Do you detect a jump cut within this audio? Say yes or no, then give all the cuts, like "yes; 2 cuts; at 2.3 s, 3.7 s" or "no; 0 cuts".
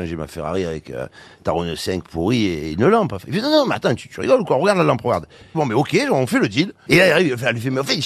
yes; 2 cuts; at 5.5 s, 6.9 s